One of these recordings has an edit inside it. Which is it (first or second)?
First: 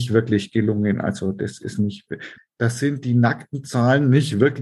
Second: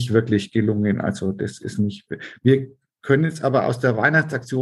first